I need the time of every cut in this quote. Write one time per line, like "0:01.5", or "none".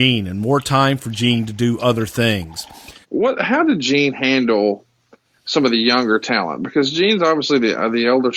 0:03.0